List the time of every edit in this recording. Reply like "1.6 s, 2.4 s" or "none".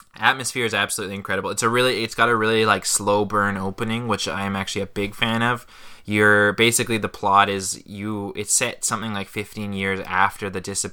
none